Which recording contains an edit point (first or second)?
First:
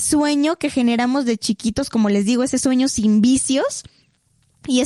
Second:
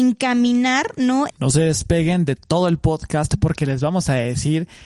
second